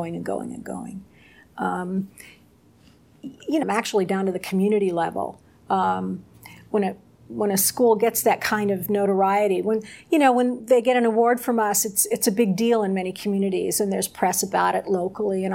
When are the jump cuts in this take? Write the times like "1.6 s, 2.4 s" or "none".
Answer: 3.6 s